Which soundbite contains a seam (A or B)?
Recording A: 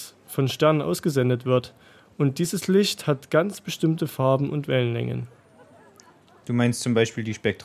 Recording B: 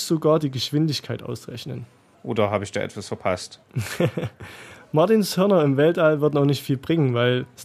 B